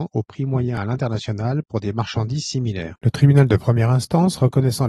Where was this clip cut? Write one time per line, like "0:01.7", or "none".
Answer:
none